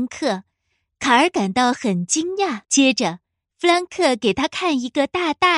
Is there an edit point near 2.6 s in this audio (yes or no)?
yes